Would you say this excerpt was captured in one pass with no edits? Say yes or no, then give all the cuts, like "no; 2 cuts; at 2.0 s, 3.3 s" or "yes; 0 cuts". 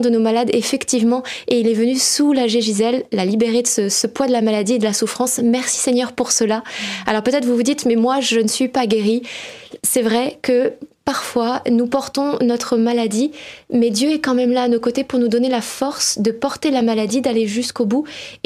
yes; 0 cuts